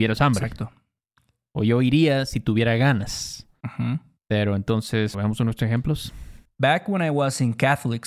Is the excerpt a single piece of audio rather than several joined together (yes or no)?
no